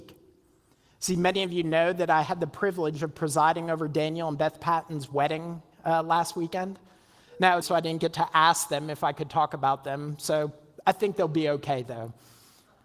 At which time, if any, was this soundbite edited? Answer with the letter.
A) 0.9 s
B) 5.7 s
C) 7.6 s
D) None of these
C